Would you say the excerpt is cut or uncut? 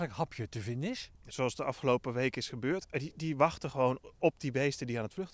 cut